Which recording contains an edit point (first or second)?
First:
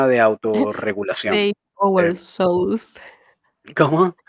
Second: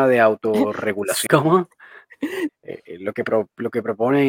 second